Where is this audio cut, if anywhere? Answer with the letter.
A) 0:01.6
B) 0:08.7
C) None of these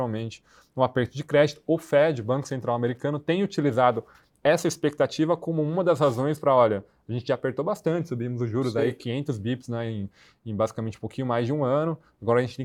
C